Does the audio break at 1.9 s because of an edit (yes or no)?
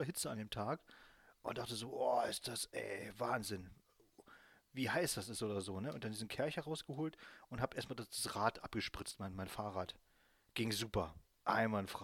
no